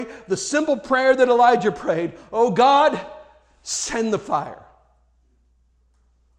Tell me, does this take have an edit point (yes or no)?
no